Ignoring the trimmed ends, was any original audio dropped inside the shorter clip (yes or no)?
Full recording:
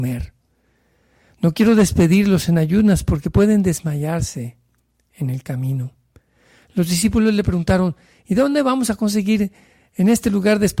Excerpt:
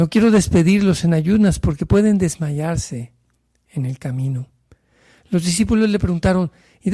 no